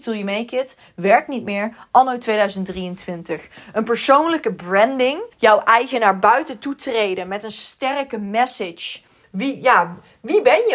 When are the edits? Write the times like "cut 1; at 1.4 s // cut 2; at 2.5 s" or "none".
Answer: cut 1; at 5.3 s // cut 2; at 9.2 s